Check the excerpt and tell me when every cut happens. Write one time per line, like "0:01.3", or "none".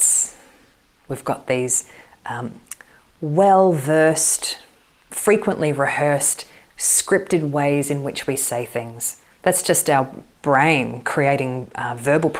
0:05.1

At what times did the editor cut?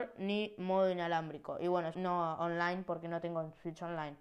0:01.9

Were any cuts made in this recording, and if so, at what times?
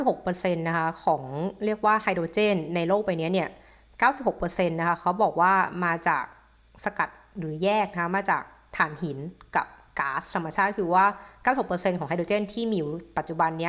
none

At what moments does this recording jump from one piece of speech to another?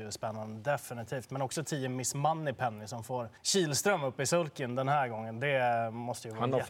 0:03.4

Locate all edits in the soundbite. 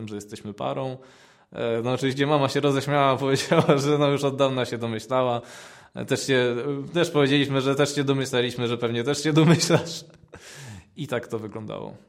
none

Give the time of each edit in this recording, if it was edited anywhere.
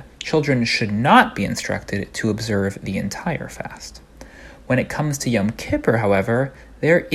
none

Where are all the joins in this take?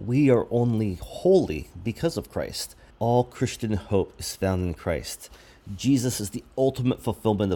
0:02.9

